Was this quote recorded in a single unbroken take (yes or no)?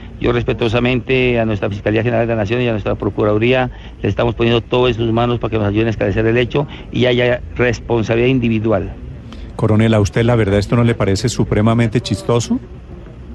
yes